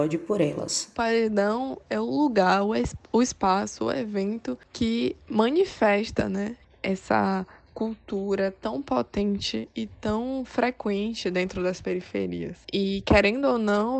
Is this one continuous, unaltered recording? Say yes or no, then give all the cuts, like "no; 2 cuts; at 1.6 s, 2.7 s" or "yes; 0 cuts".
no; 1 cut; at 6.6 s